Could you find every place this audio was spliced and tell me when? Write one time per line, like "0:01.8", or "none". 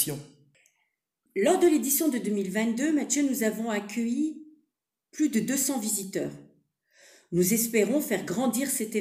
0:01.3